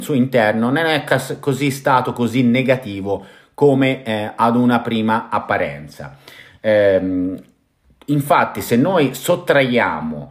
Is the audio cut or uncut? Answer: uncut